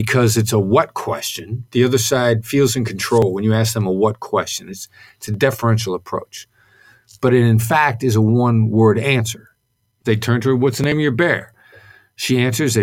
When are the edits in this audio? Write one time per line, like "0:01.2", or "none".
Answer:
0:10.0

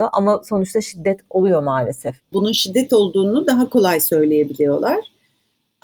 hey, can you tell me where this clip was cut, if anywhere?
0:02.3

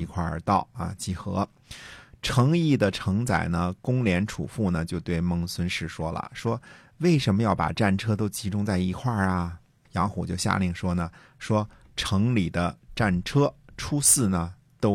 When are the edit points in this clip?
0:03.8
0:09.8

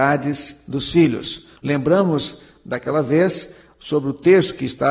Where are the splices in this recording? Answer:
0:01.6

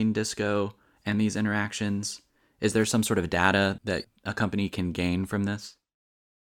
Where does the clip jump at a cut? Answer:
none

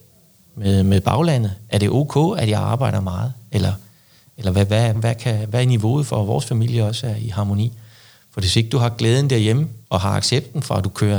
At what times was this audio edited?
0:04.9
0:09.8

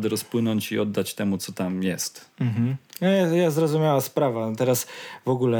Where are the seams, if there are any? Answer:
0:02.3

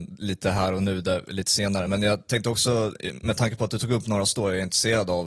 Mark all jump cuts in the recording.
none

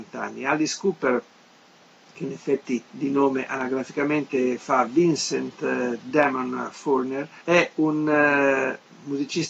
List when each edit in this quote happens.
0:02.8
0:07.4

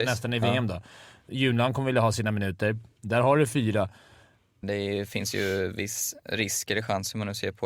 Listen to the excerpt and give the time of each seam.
0:01.3
0:04.6

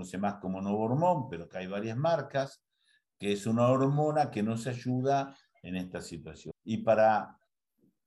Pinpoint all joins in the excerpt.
0:06.5

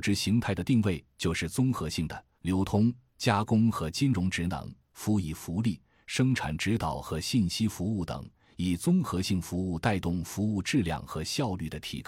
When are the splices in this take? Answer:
0:02.4

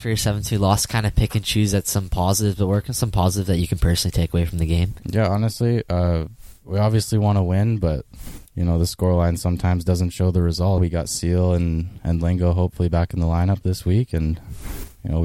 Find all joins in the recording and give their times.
0:05.0
0:10.8

